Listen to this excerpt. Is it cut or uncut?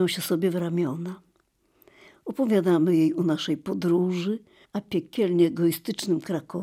cut